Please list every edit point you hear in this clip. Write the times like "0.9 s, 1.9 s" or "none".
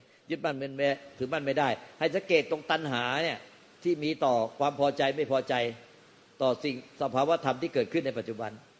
none